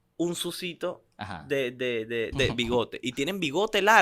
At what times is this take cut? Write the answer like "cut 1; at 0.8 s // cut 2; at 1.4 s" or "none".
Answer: cut 1; at 1.1 s // cut 2; at 2.3 s